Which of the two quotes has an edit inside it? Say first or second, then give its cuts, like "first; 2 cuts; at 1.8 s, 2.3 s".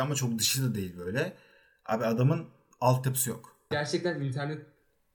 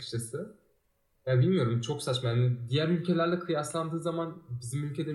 first; 1 cut; at 3.7 s